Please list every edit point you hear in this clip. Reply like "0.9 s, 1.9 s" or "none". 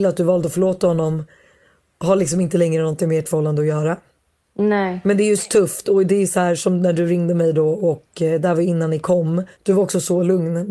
9.5 s